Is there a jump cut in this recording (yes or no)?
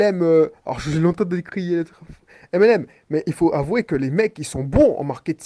no